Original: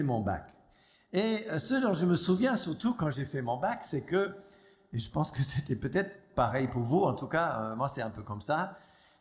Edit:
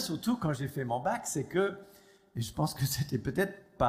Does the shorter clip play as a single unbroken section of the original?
yes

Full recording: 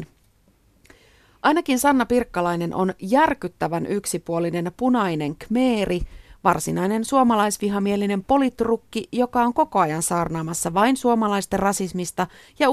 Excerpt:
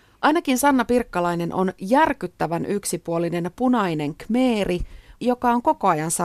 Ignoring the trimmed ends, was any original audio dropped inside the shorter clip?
yes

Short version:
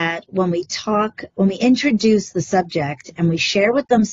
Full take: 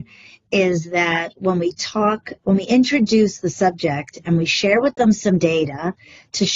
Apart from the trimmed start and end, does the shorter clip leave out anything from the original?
no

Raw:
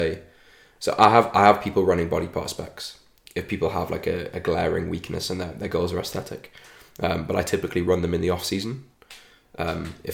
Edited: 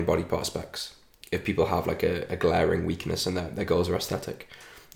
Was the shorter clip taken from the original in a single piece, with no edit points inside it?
yes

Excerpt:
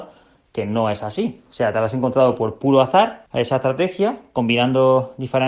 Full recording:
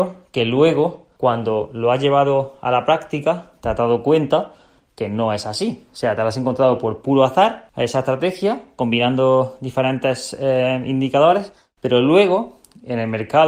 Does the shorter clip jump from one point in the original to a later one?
no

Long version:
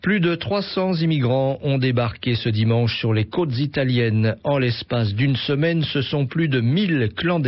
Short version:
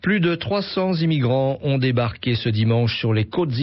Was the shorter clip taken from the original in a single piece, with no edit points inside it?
yes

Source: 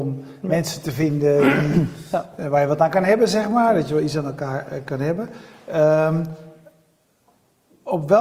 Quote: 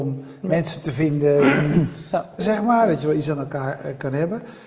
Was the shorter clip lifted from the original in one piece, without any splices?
no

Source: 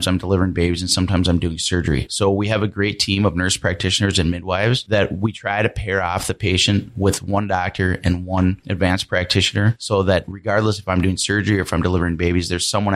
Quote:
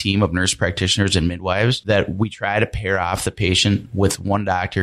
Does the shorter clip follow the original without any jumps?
yes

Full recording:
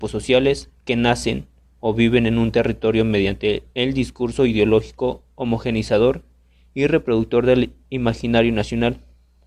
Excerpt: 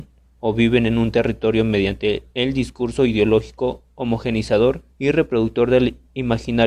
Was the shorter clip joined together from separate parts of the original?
yes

